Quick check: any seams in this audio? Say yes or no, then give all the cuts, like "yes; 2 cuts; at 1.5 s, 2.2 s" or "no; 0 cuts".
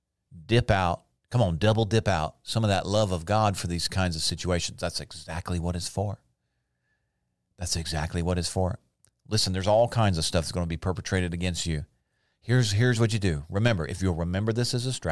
no; 0 cuts